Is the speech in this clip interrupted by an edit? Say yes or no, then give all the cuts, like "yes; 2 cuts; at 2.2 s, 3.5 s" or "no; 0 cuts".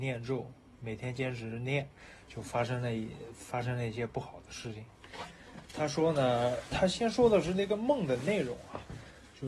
no; 0 cuts